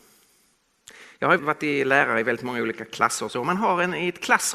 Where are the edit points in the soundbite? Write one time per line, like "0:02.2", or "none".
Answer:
0:01.4